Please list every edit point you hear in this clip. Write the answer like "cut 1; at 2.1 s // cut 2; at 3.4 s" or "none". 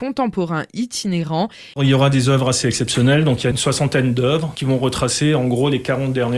cut 1; at 1.7 s